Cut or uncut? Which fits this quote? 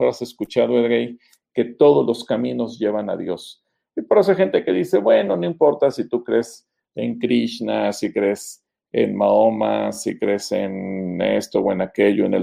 uncut